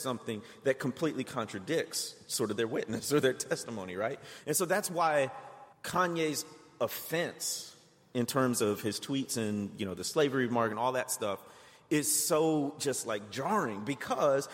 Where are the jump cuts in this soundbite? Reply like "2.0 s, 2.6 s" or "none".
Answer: 5.7 s